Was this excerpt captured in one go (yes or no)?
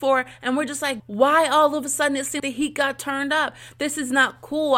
no